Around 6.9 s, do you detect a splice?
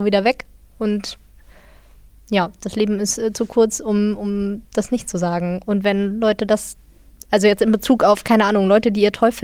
no; 0 cuts

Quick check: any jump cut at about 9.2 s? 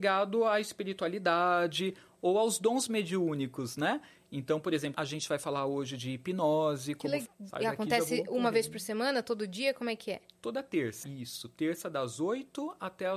no; 3 cuts; at 4.9 s, 7.3 s, 11.0 s

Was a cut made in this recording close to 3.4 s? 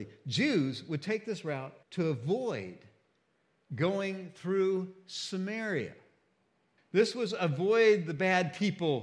no; 2 cuts; at 1.8 s, 6.8 s

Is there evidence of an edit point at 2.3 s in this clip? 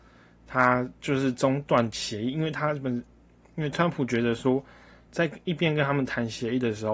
no; 1 cut; at 5.1 s

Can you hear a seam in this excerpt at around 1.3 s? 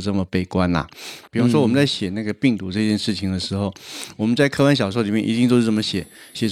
yes; 1 cut; at 1.3 s

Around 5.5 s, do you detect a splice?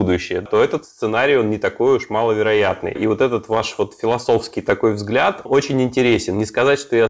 yes; 2 cuts; at 3.0 s, 5.5 s

